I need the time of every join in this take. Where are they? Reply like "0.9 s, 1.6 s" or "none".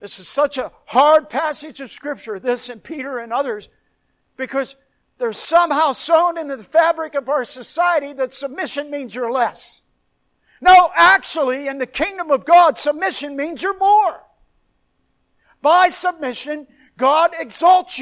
none